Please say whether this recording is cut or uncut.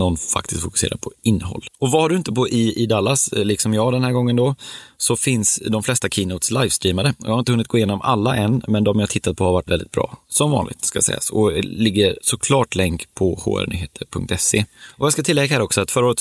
cut